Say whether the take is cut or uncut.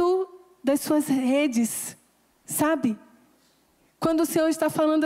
uncut